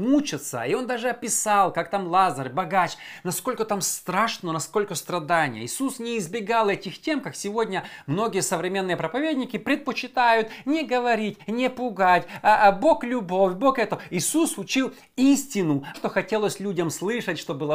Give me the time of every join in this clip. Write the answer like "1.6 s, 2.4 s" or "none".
15.9 s